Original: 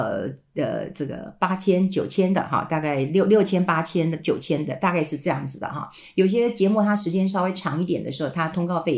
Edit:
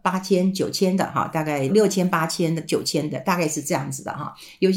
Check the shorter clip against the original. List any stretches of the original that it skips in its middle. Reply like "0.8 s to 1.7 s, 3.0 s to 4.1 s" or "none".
3.1 s to 3.2 s